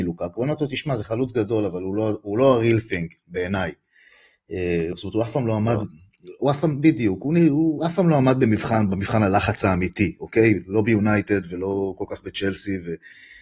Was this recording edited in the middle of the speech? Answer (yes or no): no